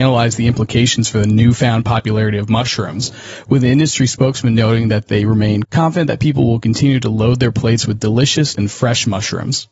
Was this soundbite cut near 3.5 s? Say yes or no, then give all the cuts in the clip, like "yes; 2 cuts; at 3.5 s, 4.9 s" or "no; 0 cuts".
no; 2 cuts; at 5.6 s, 8.5 s